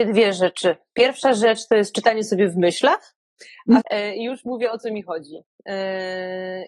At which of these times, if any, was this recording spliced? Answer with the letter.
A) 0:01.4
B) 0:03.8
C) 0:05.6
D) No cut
B